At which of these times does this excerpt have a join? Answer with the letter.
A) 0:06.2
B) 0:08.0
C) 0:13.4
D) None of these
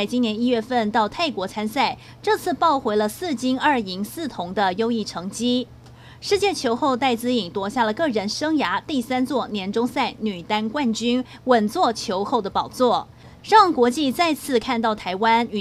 C